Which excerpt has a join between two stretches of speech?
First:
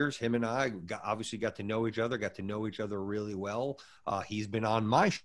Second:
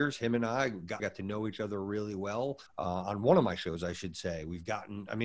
second; 2 cuts; at 1.0 s, 2.7 s

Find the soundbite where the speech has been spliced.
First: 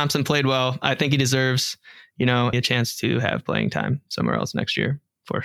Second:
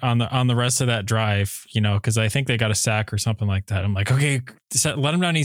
first; 1 cut; at 2.5 s

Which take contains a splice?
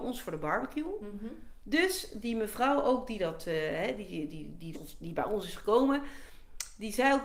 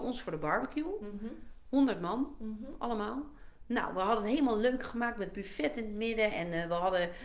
first; 2 cuts; at 1.6 s, 4.7 s

